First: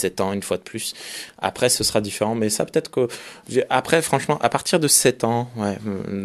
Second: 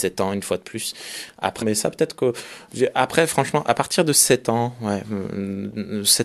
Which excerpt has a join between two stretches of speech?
second; 1 cut; at 1.6 s

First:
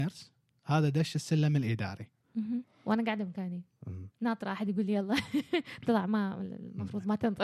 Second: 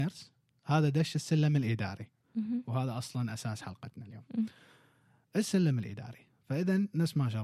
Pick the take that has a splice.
first; 1 cut; at 2.6 s

